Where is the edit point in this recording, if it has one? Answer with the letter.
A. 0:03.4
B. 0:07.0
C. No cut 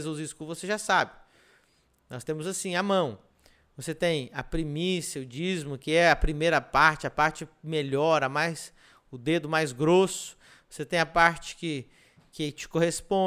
C